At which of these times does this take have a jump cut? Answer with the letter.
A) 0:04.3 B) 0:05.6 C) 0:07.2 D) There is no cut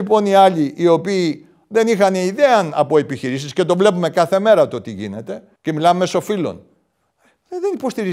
B